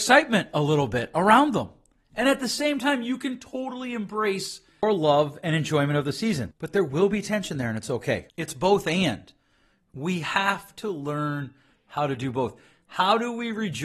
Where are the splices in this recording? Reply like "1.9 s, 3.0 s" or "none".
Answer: 6.5 s, 8.3 s